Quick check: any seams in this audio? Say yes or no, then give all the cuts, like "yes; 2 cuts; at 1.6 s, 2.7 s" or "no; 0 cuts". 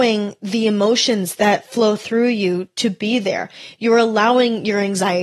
no; 0 cuts